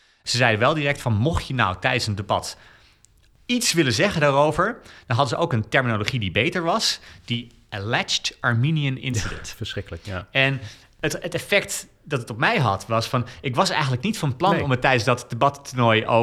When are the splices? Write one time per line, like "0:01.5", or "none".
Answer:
none